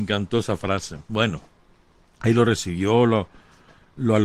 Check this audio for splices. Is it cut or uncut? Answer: uncut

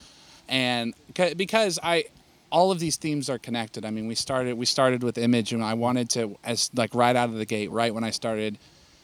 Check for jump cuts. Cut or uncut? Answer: uncut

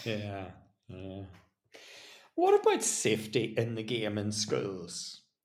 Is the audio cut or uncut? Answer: uncut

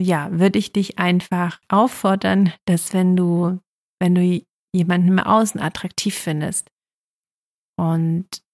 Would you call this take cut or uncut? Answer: uncut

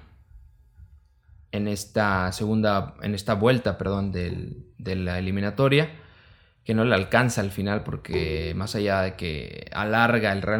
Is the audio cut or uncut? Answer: cut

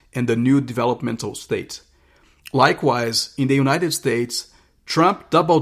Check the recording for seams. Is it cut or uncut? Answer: uncut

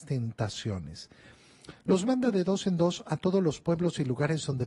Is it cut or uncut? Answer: uncut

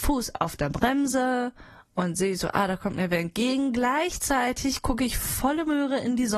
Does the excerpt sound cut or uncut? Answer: uncut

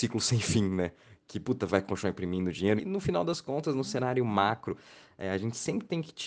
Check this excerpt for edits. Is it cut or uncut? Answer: cut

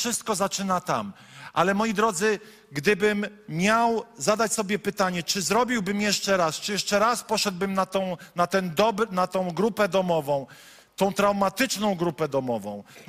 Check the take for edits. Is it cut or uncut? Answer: uncut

